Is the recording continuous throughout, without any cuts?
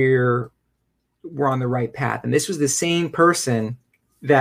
no; 1 cut; at 1.2 s

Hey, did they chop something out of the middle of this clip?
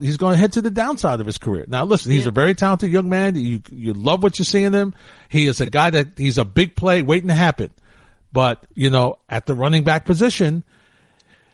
no; 0 cuts

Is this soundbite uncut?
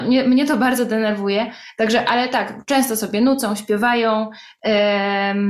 yes; 0 cuts

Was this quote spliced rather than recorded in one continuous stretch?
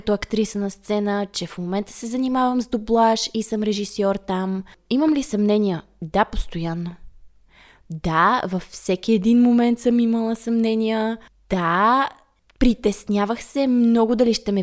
no; 0 cuts

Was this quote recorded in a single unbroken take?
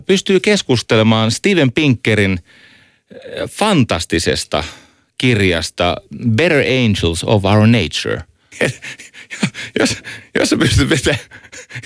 no; 1 cut; at 8.5 s

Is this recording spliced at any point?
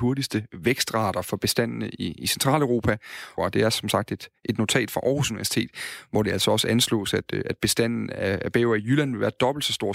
yes; 1 cut; at 3.4 s

